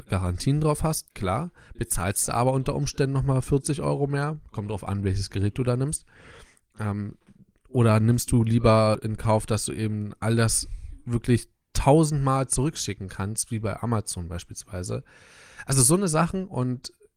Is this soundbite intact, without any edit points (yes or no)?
yes